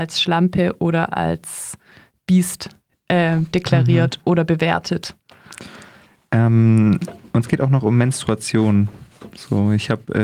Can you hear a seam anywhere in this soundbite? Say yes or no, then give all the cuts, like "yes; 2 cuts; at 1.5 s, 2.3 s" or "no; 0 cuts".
no; 0 cuts